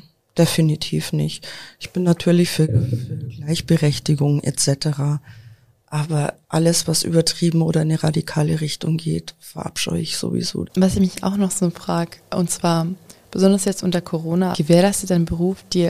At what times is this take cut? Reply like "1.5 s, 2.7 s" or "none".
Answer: 10.7 s, 14.5 s